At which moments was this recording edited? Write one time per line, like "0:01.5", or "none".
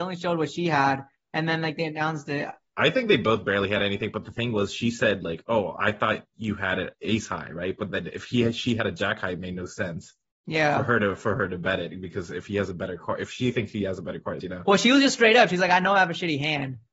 0:14.4